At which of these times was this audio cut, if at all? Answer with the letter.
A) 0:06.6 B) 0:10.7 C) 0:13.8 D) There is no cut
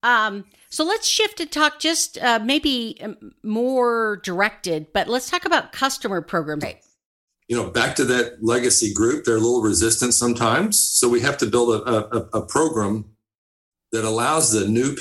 A